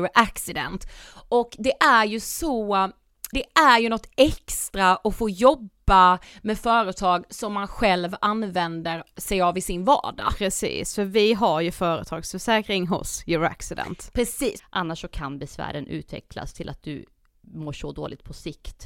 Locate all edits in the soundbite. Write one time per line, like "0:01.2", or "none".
0:03.3
0:14.6